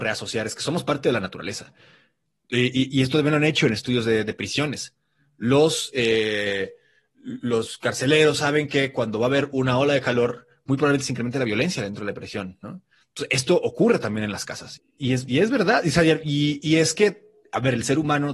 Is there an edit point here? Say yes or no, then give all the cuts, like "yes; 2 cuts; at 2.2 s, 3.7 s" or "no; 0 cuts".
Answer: yes; 1 cut; at 14.8 s